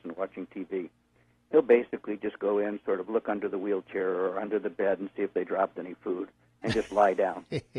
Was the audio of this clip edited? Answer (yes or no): no